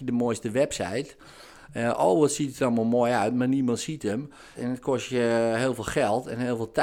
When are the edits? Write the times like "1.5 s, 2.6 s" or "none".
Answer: 4.5 s